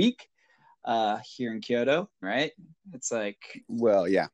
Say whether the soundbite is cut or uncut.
cut